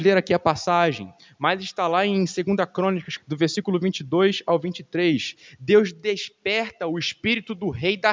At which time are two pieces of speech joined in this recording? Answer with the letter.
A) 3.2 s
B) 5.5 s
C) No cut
A